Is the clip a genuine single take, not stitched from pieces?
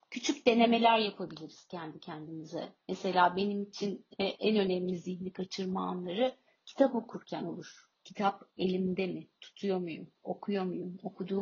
no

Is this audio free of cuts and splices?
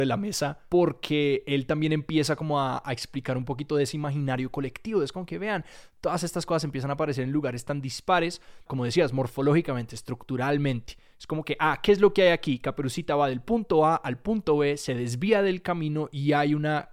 no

